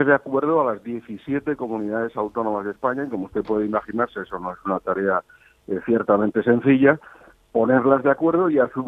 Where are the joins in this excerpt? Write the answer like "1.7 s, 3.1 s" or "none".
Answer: none